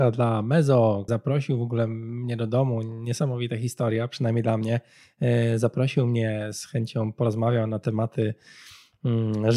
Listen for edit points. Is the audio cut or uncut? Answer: cut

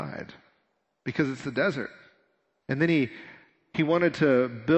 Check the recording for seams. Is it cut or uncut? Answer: cut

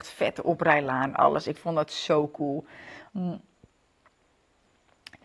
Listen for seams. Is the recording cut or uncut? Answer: cut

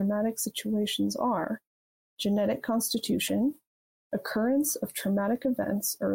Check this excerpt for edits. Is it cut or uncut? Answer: cut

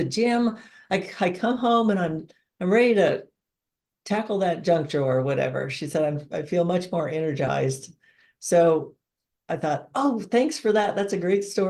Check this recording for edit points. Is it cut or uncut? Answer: uncut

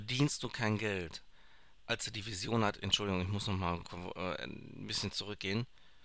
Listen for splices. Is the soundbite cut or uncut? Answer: cut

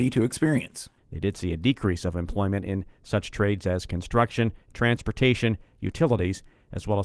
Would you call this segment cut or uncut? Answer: cut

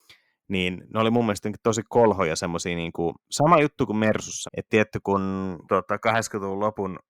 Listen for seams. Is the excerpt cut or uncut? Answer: cut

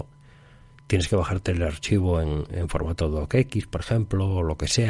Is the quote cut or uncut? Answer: uncut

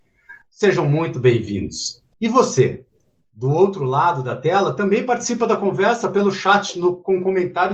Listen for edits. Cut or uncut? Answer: cut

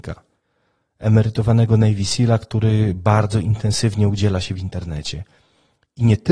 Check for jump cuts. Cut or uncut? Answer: uncut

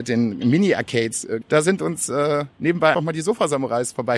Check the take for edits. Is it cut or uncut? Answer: cut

